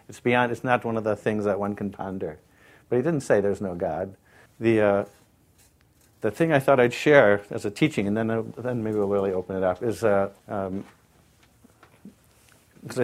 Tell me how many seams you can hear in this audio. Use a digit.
2